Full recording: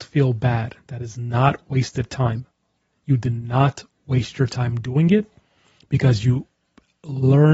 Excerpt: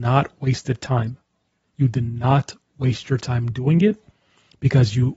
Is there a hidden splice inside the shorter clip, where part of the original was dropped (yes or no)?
no